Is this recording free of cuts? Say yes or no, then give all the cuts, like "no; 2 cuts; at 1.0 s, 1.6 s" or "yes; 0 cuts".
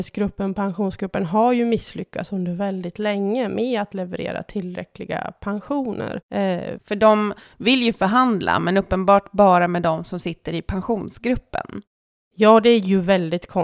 no; 1 cut; at 6.8 s